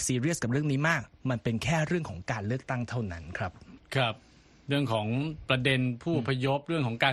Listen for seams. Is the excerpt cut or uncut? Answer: uncut